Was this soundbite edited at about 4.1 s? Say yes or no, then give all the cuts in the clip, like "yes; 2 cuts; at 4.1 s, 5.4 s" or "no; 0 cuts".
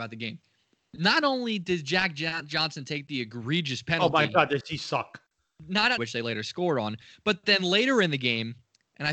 no; 1 cut; at 6.0 s